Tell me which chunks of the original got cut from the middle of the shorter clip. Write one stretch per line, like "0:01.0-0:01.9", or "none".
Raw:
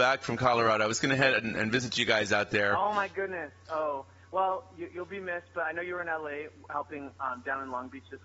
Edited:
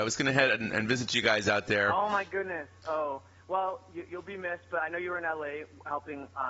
none